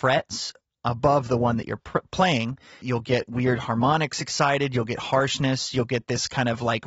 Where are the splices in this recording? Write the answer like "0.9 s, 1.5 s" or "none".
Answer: 2.8 s

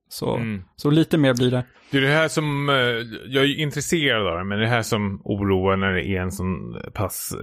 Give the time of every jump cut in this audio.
none

